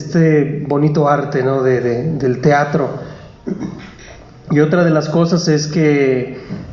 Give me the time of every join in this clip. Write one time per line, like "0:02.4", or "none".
none